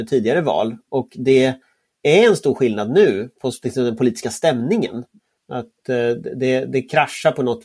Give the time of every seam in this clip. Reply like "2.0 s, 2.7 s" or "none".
5.4 s